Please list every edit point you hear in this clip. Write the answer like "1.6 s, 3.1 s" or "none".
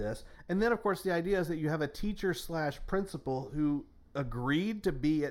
none